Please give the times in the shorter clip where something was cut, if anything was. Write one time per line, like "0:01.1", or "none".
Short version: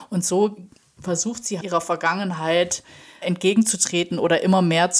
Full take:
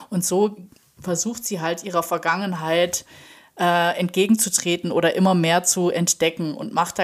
0:01.6
0:03.2